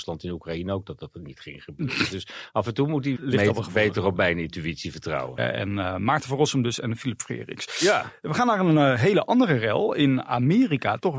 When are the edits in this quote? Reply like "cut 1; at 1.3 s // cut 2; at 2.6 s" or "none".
cut 1; at 3.1 s // cut 2; at 5.4 s